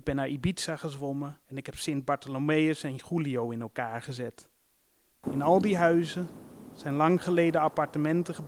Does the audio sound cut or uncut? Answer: cut